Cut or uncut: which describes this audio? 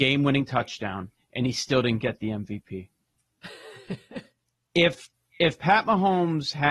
uncut